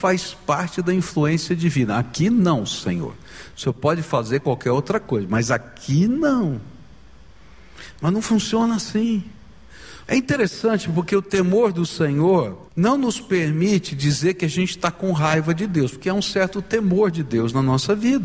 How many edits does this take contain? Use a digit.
2